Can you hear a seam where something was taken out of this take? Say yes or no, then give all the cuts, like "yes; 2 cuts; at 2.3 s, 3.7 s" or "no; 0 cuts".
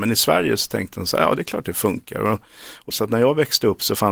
yes; 1 cut; at 2.9 s